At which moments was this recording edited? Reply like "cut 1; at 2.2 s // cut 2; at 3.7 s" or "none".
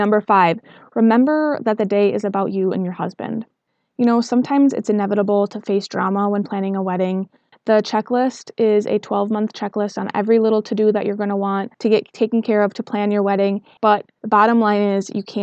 cut 1; at 7.5 s // cut 2; at 13.8 s